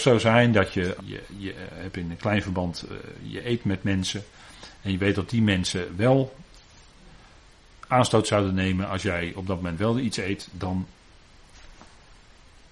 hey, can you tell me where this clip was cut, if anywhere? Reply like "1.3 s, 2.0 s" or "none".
1.0 s

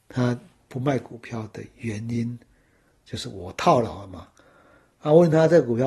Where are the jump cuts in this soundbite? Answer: none

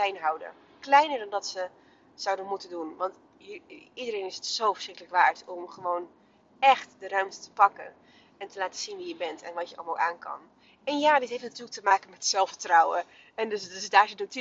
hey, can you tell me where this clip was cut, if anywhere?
none

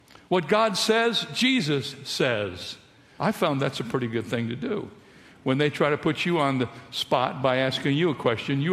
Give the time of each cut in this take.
3.2 s

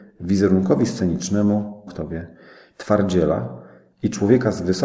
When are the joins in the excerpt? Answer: 1.9 s

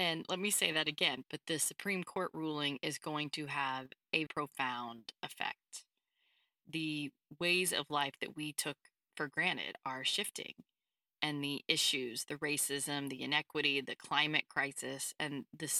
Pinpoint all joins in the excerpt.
1.2 s, 4.3 s

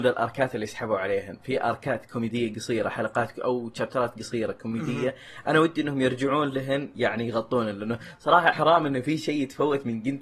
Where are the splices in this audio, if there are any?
8.5 s

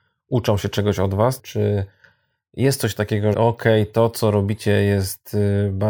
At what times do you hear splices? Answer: 1.4 s, 3.3 s

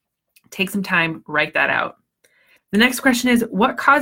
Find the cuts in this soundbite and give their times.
2.6 s

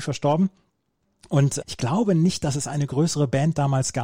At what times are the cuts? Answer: 1.6 s

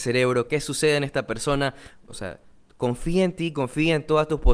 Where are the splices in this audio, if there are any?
2.1 s

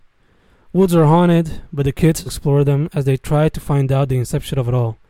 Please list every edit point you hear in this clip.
2.3 s

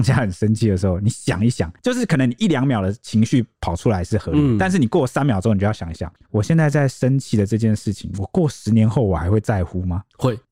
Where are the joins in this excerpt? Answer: none

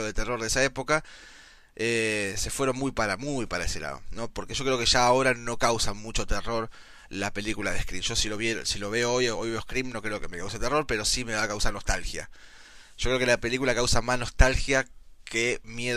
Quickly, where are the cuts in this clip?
none

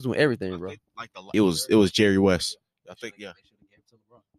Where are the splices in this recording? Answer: 1.3 s

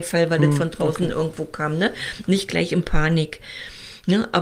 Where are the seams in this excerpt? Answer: none

